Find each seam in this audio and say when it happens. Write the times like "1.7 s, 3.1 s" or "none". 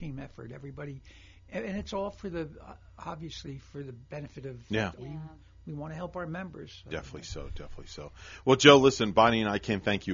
5.0 s